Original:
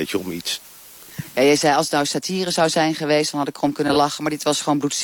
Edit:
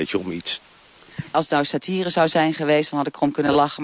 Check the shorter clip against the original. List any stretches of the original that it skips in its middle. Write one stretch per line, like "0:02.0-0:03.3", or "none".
0:01.3-0:01.8